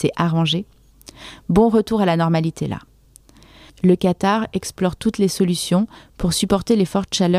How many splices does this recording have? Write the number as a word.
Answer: one